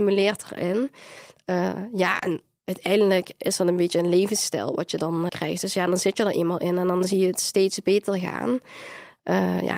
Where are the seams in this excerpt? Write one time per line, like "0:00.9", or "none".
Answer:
0:05.3